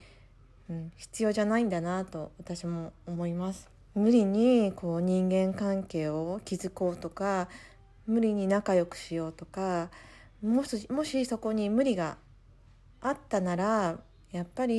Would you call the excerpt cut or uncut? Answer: cut